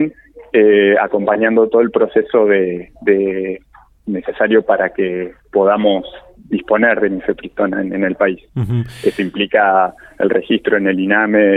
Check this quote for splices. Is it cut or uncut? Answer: uncut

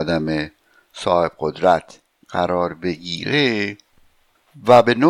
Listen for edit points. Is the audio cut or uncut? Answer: uncut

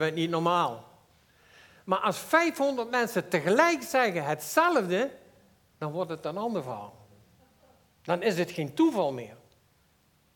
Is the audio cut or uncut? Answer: uncut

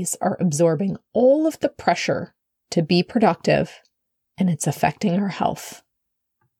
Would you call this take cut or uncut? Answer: uncut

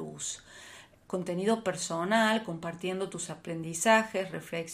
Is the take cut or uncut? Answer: cut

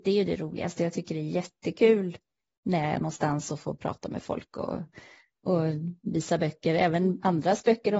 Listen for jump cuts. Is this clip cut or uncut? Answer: uncut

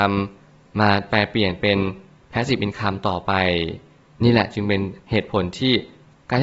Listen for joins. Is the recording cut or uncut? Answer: uncut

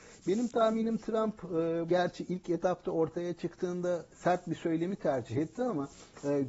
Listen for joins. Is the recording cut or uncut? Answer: cut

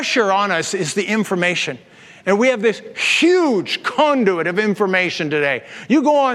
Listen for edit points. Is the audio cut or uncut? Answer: uncut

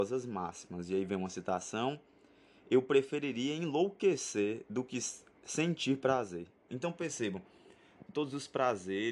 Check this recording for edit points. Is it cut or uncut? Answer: cut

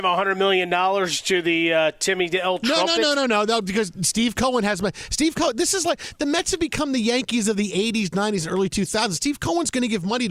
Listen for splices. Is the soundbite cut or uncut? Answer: uncut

